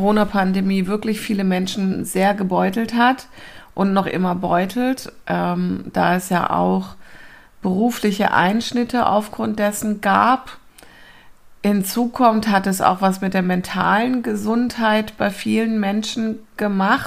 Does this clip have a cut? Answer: no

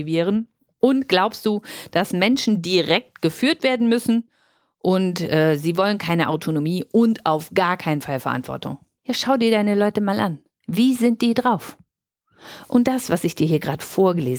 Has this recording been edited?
no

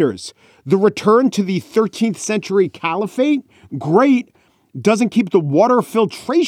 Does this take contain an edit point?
no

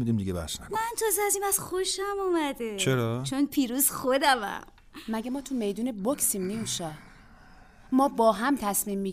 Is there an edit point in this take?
no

